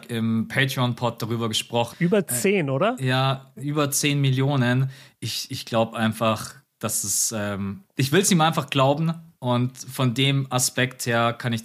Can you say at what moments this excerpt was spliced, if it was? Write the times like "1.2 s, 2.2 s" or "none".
1.9 s